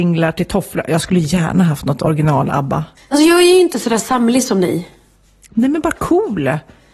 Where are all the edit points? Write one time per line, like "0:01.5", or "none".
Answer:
0:03.0